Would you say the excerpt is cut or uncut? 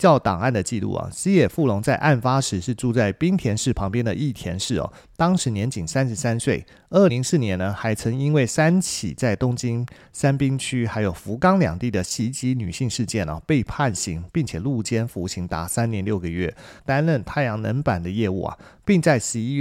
cut